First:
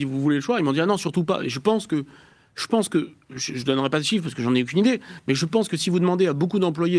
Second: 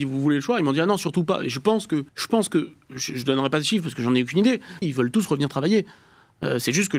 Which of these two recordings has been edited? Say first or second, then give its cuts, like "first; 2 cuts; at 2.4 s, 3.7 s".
second; 2 cuts; at 2.1 s, 4.8 s